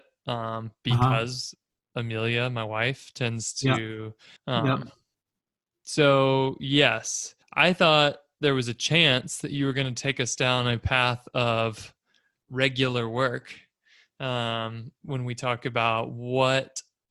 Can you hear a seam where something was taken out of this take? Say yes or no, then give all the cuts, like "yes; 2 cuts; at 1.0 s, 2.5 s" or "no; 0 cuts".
yes; 2 cuts; at 4.4 s, 7.4 s